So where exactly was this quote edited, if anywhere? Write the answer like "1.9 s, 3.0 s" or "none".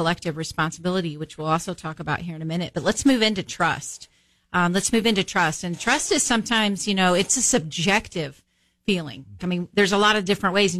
9.4 s